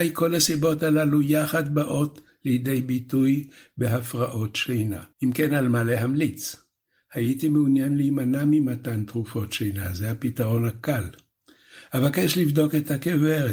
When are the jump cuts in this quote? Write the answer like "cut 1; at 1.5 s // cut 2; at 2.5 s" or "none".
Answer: cut 1; at 5.1 s